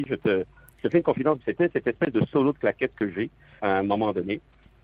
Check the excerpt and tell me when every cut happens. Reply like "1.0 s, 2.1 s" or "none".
1.4 s, 3.6 s